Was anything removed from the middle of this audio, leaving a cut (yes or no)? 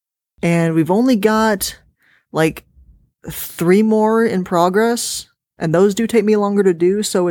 no